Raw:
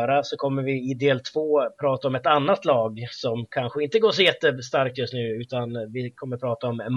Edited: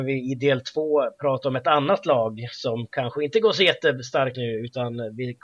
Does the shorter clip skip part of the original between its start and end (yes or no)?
yes